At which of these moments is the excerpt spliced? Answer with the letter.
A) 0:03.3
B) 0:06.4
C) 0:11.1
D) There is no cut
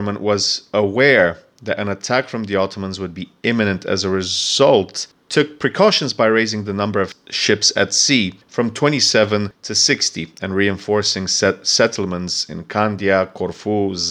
D